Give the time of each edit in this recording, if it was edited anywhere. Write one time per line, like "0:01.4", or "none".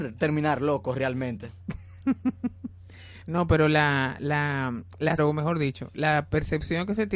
0:05.2